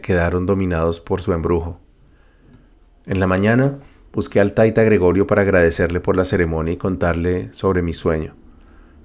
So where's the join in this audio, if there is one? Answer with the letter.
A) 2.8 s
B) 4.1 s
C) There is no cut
B